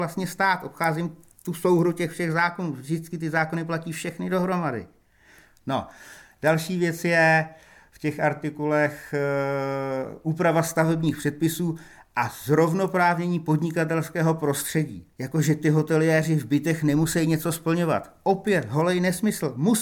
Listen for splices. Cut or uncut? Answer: cut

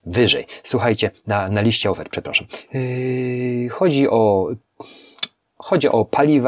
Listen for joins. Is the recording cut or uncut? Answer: cut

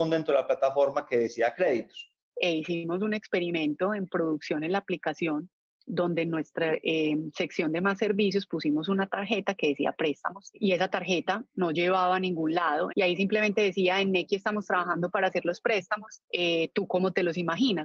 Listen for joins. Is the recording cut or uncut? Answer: cut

